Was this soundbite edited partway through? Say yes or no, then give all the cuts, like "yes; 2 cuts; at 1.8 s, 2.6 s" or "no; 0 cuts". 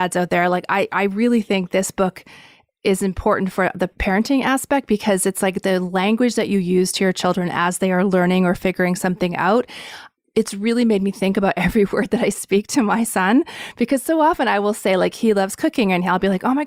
no; 0 cuts